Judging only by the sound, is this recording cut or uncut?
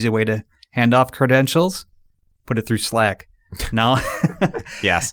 uncut